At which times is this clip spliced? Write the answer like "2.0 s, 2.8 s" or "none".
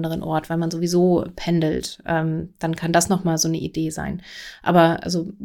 none